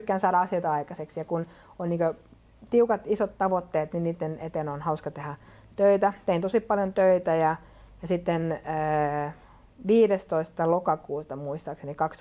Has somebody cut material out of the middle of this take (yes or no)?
no